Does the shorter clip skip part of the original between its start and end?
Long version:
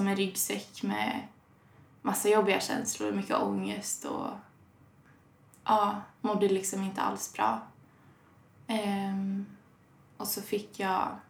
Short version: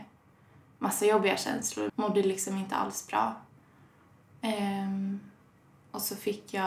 yes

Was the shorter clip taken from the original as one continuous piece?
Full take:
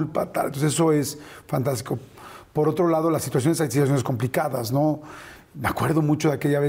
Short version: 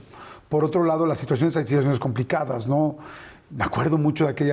yes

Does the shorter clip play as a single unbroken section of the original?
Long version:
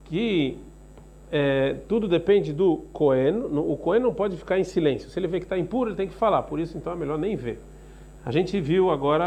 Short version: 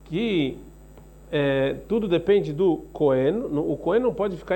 yes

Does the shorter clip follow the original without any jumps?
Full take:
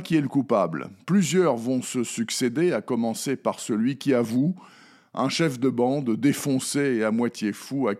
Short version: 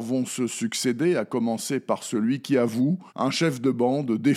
no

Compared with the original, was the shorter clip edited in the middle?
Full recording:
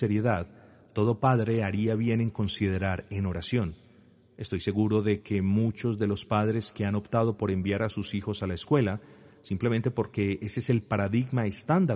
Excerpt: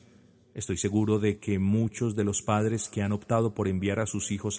no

